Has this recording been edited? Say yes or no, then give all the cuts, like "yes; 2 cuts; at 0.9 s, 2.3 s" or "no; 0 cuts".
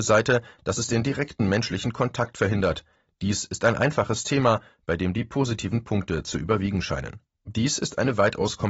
yes; 1 cut; at 7.3 s